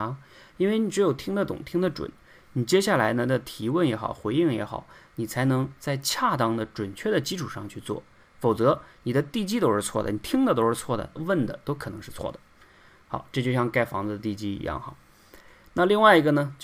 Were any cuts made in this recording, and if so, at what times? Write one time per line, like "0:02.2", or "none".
0:11.1